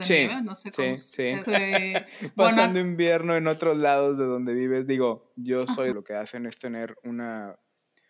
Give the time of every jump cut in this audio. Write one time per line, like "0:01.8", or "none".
0:01.4
0:05.9